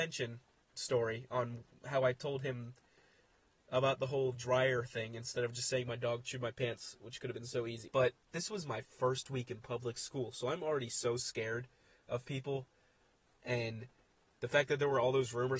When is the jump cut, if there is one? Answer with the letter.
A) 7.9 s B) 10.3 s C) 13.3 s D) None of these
A